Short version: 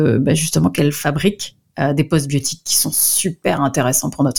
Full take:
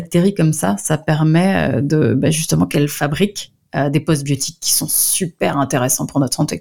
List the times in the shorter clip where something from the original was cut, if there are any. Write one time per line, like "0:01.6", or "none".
none